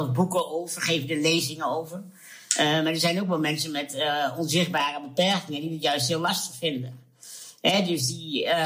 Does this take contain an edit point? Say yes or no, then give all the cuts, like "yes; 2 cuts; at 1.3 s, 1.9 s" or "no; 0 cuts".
no; 0 cuts